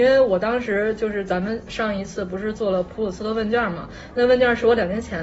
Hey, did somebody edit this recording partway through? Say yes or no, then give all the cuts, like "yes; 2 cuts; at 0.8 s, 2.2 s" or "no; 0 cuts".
yes; 1 cut; at 1.7 s